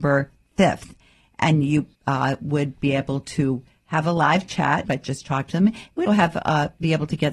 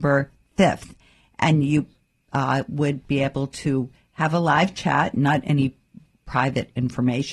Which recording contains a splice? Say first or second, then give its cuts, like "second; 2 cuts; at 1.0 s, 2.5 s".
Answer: first; 3 cuts; at 1.9 s, 4.8 s, 6.1 s